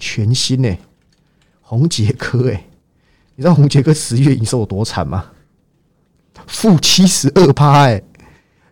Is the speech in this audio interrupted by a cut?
no; 0 cuts

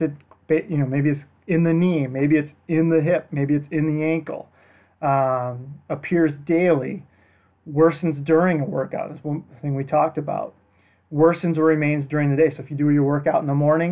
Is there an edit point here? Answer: no; 0 cuts

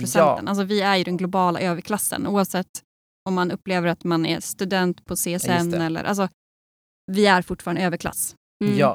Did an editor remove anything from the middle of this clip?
no; 0 cuts

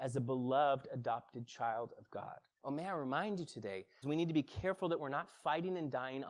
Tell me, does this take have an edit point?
yes; 2 cuts; at 2.5 s, 4.0 s

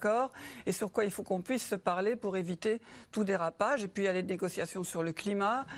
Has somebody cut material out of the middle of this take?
no; 0 cuts

